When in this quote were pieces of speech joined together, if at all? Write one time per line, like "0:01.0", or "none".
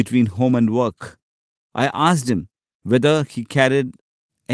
0:01.6